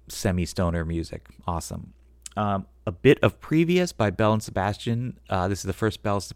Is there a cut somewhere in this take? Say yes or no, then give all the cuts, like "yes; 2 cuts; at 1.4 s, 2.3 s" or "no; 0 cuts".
no; 0 cuts